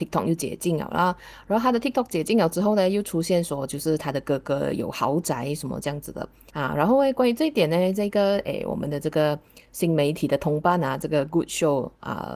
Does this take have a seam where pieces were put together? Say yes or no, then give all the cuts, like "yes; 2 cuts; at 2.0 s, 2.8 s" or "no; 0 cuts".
yes; 1 cut; at 6.5 s